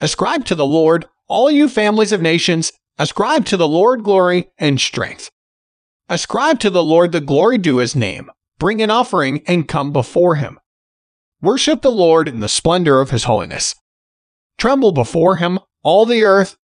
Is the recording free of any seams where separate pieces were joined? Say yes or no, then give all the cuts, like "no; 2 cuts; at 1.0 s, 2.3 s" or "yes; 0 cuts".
yes; 0 cuts